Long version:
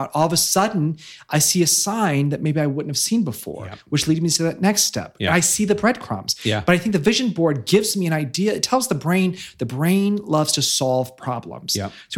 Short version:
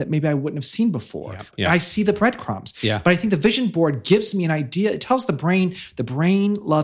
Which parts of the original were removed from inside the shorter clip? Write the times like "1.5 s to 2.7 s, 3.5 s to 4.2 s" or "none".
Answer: 3.8 s to 5.1 s